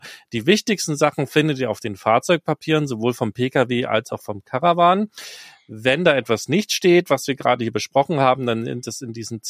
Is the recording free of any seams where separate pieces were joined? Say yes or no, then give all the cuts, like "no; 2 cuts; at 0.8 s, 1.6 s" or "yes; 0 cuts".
yes; 0 cuts